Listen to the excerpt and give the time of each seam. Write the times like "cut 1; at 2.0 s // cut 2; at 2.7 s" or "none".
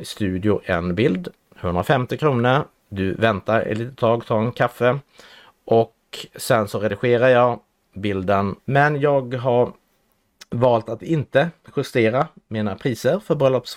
cut 1; at 2.8 s // cut 2; at 8.6 s

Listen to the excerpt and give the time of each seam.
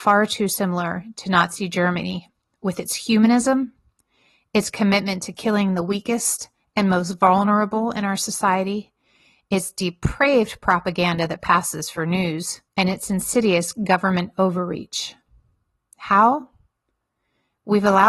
cut 1; at 12.7 s

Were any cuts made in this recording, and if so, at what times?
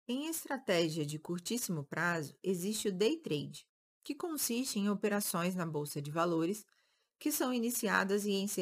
none

